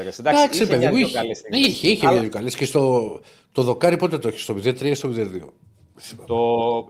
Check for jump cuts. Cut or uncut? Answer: uncut